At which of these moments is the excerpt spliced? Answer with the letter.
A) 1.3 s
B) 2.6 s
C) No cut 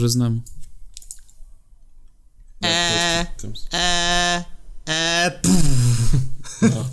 B